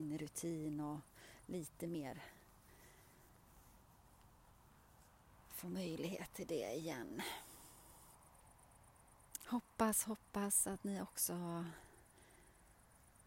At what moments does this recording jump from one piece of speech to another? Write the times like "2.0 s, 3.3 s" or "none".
9.4 s

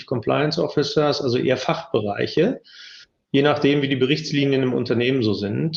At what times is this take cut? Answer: 3.2 s

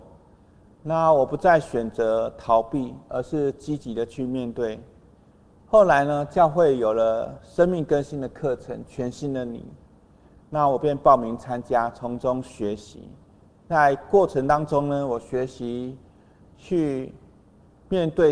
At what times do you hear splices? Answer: none

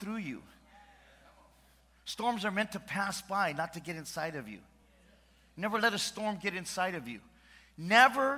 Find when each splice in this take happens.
none

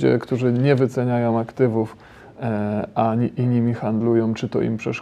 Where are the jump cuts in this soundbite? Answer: none

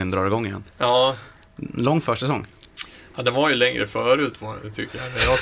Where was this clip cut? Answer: none

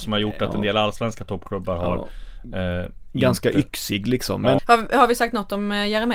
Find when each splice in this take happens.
4.6 s

